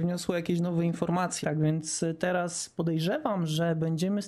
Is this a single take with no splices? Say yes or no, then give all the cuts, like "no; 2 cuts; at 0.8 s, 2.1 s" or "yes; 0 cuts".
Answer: no; 1 cut; at 1.4 s